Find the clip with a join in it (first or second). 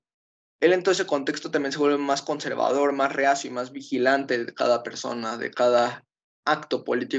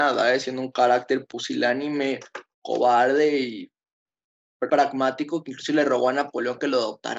second